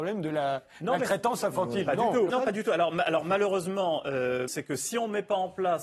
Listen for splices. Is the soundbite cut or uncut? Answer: cut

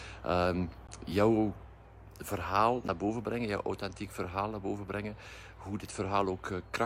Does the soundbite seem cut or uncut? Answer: uncut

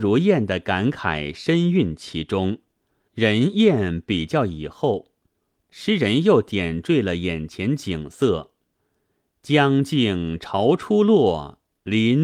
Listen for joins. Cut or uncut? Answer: cut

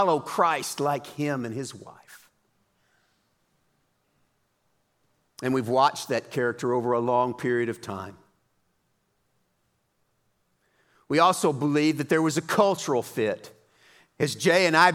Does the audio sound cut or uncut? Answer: uncut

